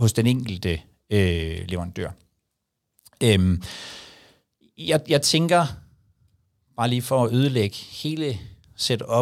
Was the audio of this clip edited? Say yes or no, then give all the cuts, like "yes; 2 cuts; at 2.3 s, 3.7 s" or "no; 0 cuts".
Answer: no; 0 cuts